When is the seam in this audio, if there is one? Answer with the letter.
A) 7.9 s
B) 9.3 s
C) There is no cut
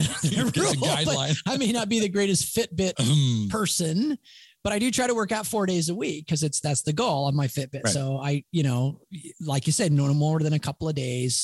C